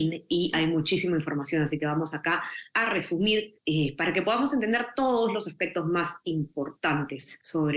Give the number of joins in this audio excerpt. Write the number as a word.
zero